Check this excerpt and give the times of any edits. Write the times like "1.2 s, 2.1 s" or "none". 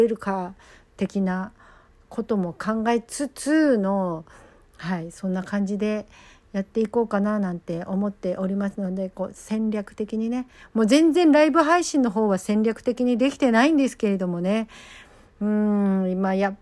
none